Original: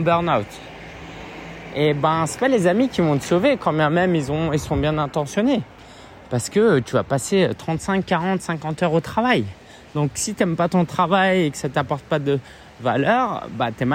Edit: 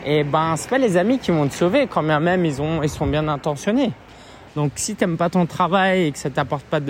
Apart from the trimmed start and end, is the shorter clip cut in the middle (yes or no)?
yes